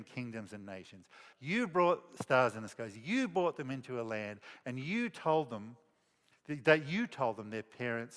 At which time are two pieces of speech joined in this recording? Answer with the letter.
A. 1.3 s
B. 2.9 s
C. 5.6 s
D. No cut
A